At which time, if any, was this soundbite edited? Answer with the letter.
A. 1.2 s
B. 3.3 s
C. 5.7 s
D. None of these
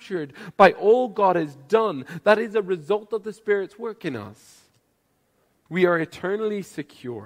C